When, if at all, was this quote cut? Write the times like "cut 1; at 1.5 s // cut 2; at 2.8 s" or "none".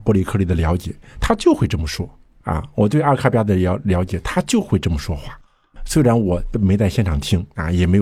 none